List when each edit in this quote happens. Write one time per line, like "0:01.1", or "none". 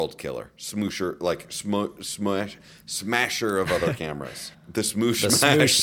0:04.5